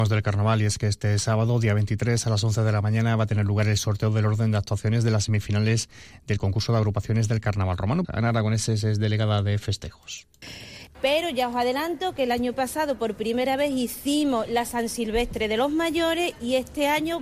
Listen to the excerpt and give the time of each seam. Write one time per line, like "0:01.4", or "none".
0:08.0
0:10.9

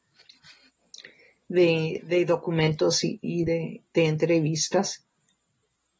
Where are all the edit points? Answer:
none

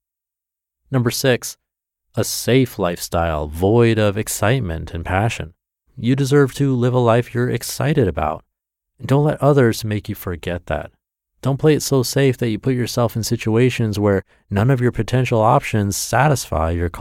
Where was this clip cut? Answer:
0:05.9

